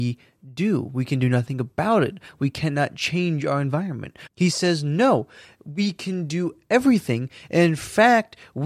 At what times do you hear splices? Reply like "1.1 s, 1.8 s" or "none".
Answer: 4.3 s